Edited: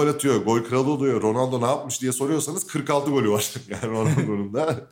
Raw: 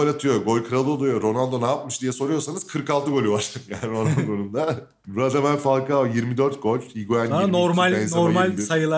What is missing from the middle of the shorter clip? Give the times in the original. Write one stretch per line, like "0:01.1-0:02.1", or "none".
none